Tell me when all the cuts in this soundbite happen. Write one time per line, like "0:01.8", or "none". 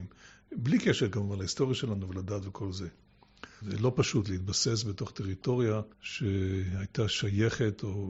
0:03.6
0:05.9